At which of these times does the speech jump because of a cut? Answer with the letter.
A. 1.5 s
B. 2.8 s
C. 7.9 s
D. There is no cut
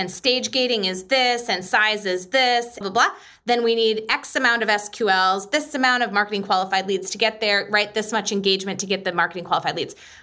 B